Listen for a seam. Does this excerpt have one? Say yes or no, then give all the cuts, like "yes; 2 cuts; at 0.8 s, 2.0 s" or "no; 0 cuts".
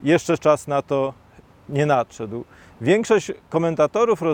no; 0 cuts